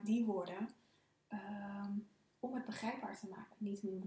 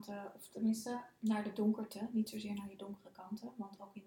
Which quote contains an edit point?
second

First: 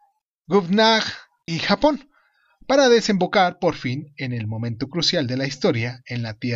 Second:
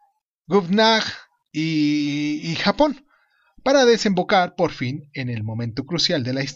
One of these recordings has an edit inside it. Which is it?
first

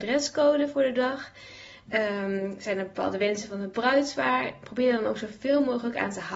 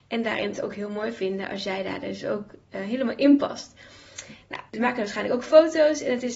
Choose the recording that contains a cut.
second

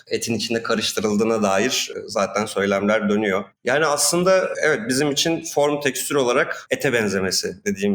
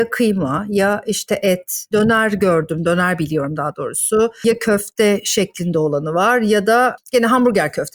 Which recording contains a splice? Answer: first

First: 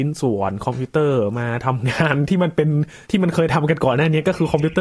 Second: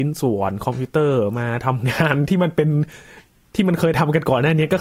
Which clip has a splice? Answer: first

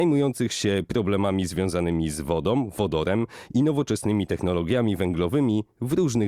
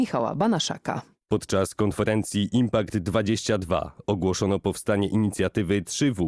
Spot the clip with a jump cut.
second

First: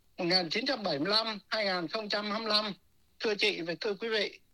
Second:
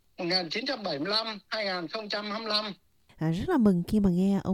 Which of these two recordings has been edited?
second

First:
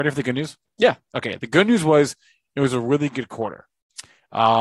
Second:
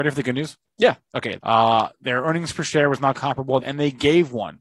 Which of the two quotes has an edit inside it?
second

